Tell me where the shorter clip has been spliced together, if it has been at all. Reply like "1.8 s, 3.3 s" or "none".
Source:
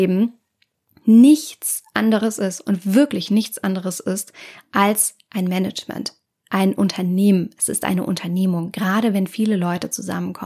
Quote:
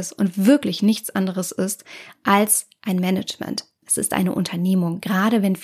3.8 s